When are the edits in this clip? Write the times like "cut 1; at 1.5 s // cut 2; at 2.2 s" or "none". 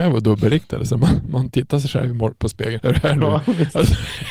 cut 1; at 2.8 s